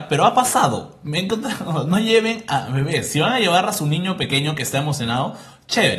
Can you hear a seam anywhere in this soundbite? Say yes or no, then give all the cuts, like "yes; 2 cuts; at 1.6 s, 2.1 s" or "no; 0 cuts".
no; 0 cuts